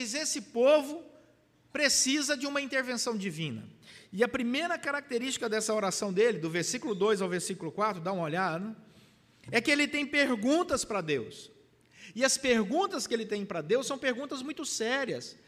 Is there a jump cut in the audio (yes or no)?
no